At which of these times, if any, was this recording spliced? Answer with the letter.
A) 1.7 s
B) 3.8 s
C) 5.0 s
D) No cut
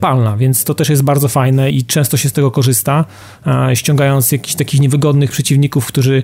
A